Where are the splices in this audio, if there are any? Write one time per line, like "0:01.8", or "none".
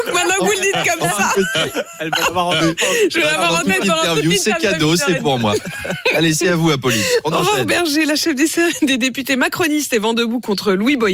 none